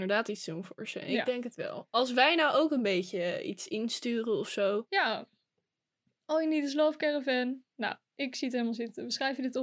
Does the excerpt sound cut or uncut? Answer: uncut